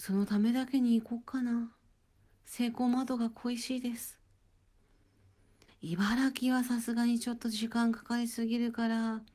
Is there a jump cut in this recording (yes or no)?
yes